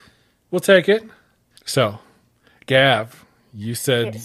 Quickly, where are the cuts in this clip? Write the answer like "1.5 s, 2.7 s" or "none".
1.6 s